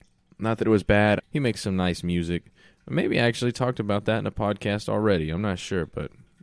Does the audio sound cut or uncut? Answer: cut